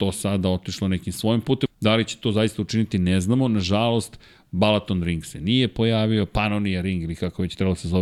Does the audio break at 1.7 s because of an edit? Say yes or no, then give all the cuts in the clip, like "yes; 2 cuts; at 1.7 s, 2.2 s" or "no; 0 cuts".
yes; 1 cut; at 1.7 s